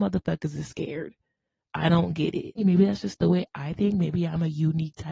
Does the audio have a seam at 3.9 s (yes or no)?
no